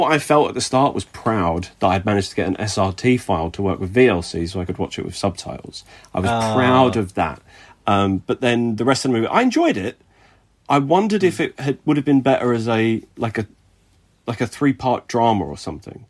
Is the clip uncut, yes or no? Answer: yes